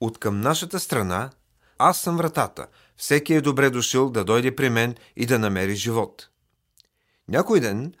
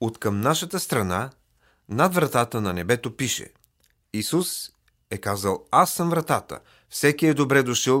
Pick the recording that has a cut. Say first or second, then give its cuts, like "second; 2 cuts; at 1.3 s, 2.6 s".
first; 1 cut; at 1.8 s